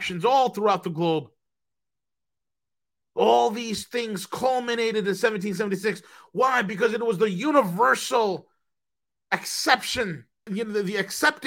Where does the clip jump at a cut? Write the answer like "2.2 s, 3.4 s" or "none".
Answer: 10.5 s